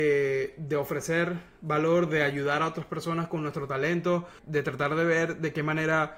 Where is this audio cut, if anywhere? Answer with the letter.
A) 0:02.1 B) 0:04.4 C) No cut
B